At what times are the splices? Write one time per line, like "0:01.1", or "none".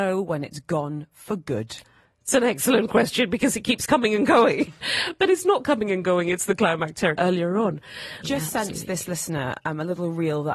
0:07.2
0:08.2